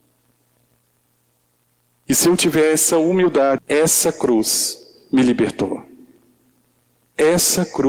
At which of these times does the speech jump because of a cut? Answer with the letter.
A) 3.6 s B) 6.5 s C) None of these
A